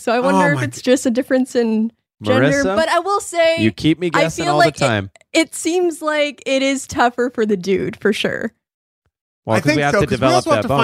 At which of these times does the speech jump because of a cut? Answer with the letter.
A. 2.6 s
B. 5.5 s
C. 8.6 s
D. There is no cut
D